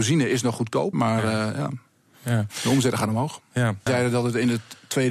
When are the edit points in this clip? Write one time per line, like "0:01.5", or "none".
0:00.9
0:03.9